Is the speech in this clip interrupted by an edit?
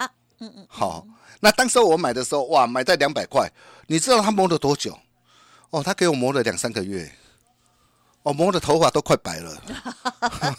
no; 0 cuts

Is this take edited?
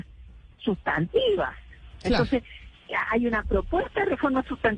yes; 1 cut; at 3.1 s

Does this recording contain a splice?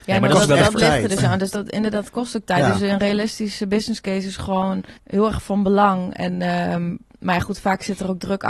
yes; 1 cut; at 5.0 s

